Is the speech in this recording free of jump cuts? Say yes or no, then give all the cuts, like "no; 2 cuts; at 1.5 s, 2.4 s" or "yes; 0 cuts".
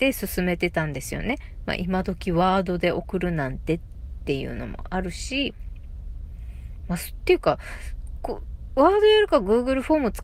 yes; 0 cuts